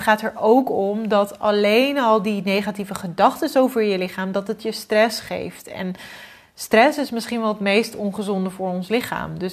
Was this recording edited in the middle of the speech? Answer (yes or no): no